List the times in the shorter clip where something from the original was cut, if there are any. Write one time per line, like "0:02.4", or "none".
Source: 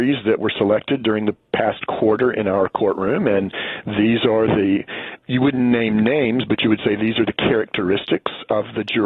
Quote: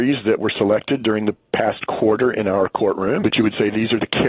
0:03.2